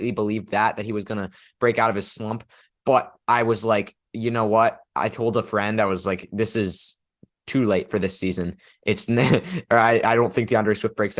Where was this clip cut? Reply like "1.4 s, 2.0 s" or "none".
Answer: none